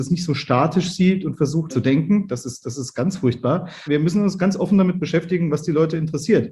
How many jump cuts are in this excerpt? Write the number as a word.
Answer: two